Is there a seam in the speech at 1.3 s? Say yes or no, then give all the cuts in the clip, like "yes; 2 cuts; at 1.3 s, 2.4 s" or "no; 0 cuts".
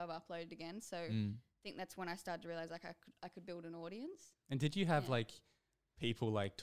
no; 0 cuts